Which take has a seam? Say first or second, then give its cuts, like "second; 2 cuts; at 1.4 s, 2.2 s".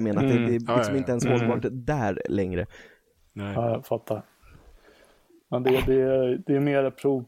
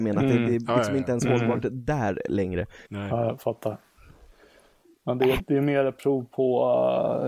second; 2 cuts; at 2.9 s, 5.4 s